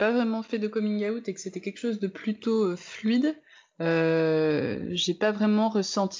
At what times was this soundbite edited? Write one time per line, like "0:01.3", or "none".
none